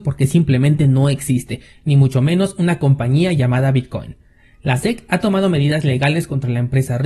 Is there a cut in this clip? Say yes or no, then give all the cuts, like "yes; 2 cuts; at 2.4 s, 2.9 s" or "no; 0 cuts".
no; 0 cuts